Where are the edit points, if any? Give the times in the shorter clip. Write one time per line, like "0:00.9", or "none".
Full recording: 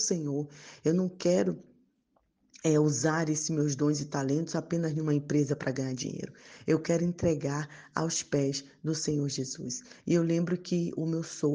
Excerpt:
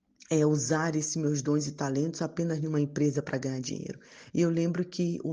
0:04.3